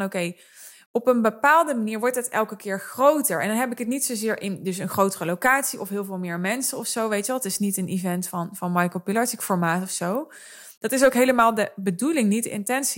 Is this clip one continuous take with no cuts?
yes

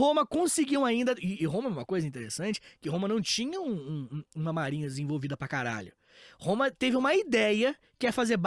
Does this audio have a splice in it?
no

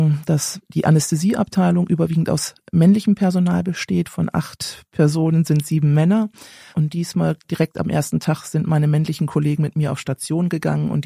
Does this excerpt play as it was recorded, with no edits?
no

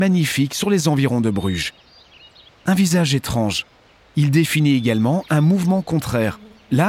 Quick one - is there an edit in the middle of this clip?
yes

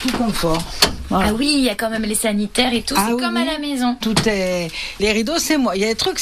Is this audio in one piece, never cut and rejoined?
no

